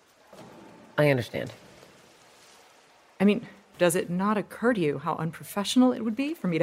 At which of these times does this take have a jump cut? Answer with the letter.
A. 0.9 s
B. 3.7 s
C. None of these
B